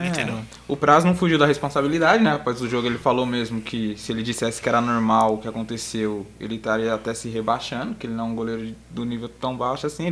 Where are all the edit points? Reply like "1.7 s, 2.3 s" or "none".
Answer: none